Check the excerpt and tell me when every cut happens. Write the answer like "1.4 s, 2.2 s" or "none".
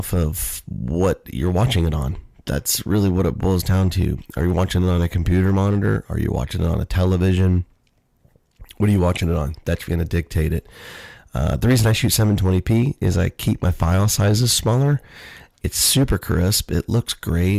9.9 s